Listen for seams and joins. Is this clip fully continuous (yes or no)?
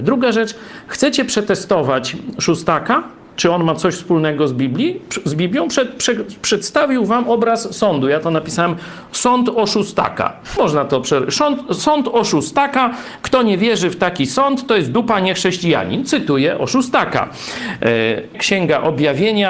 no